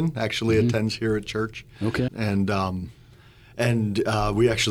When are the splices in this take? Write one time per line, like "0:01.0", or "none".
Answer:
0:02.1